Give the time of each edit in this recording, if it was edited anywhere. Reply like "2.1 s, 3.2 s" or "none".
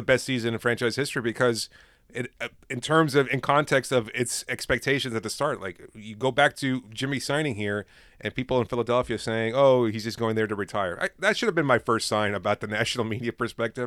none